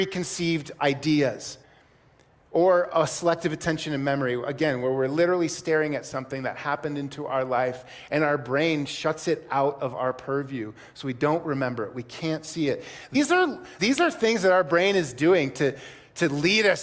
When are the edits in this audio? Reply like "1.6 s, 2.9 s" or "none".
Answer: 13.8 s